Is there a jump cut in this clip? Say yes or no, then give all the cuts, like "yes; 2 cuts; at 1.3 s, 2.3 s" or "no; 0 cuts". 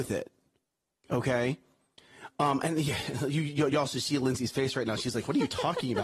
no; 0 cuts